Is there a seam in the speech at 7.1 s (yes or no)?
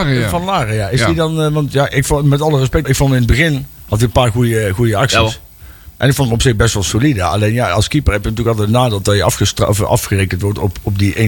no